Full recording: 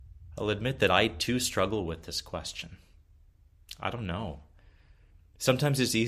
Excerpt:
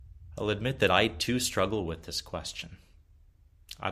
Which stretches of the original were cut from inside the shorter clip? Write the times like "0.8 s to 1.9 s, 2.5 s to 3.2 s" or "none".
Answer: none